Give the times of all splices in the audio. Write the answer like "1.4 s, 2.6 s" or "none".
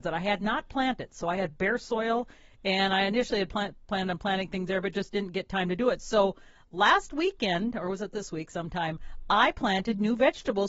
none